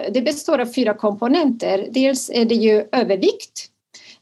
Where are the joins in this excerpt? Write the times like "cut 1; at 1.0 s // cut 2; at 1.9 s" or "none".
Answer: none